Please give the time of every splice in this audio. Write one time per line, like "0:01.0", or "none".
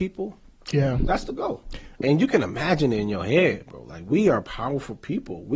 0:02.0

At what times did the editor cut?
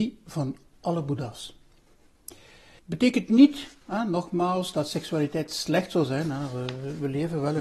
0:02.8

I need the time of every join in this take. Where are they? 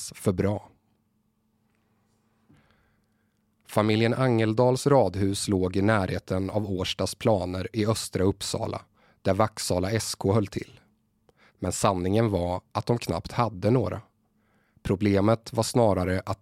0:11.5

